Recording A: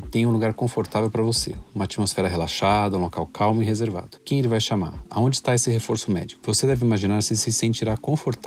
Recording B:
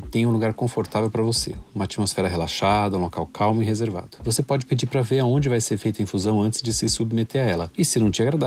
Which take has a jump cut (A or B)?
A